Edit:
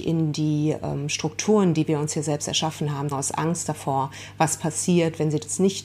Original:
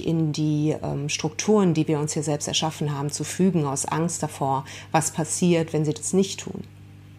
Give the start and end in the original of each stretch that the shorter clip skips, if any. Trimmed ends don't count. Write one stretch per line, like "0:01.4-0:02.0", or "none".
0:03.1-0:03.6